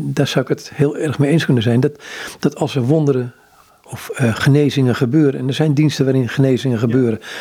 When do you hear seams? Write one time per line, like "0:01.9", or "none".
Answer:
none